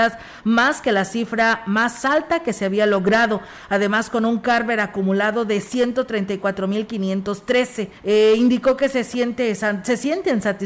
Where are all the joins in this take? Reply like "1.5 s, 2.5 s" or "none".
8.0 s